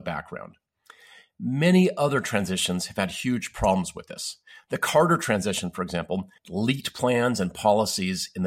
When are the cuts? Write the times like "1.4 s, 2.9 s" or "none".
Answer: 6.4 s

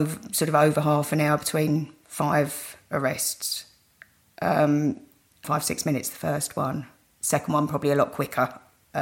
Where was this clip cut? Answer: 5.4 s

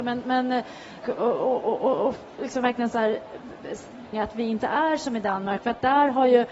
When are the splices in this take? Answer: 1.0 s, 4.1 s

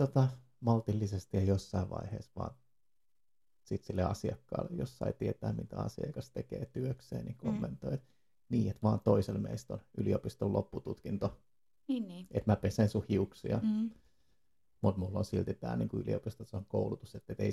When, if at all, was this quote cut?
none

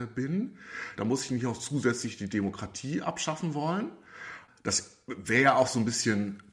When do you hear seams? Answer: none

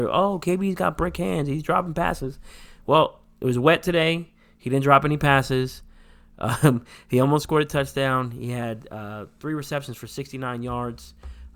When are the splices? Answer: none

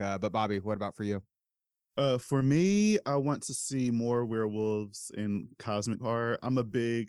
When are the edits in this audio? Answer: none

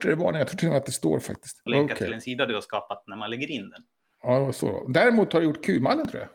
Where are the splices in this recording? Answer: 1.7 s

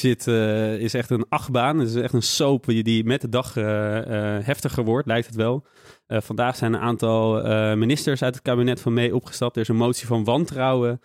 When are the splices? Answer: none

